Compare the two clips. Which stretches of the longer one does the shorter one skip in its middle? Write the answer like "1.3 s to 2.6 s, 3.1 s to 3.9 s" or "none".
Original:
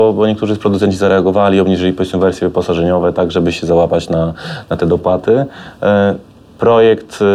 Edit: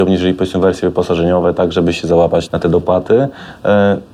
4.1 s to 4.6 s